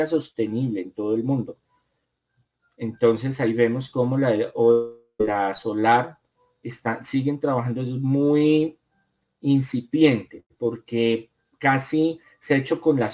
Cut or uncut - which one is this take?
uncut